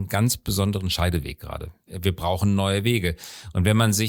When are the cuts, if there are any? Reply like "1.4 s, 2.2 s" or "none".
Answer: 1.9 s